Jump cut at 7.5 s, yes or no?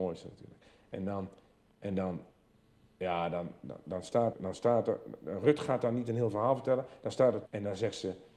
yes